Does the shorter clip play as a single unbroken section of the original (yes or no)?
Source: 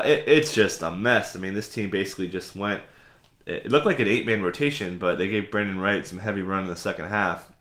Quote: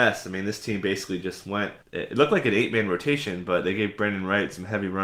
no